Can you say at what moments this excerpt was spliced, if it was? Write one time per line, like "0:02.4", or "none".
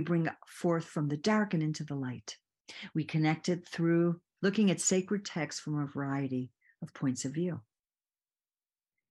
0:02.9
0:04.4